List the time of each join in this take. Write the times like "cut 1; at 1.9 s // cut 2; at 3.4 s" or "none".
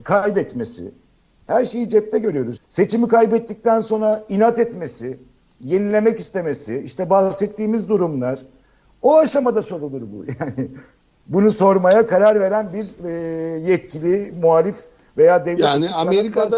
cut 1; at 2.6 s